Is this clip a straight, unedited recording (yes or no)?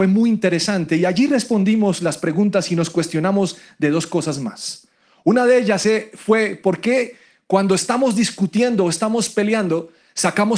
yes